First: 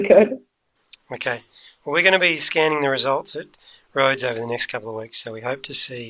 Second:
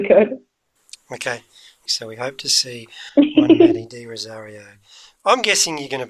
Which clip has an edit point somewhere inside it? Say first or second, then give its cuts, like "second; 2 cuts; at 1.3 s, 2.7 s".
second; 1 cut; at 1.9 s